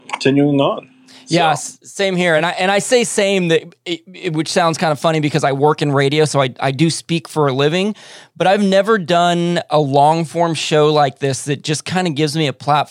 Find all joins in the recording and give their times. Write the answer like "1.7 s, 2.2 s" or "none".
none